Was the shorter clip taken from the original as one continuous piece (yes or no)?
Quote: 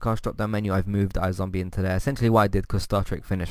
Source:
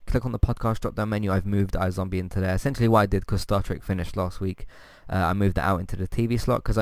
yes